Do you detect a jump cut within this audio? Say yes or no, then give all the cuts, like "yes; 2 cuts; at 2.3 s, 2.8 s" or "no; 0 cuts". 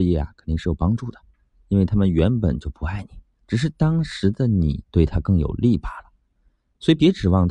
yes; 2 cuts; at 1.5 s, 4.9 s